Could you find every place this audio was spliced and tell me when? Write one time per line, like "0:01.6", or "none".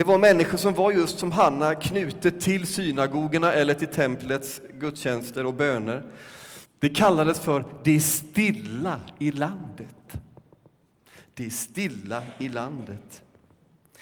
0:06.6